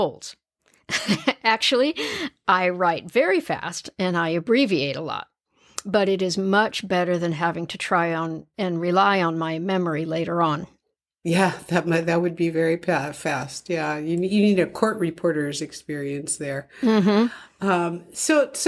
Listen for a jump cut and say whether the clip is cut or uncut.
uncut